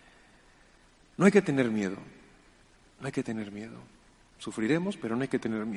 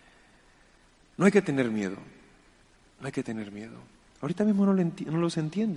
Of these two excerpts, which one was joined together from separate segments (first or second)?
second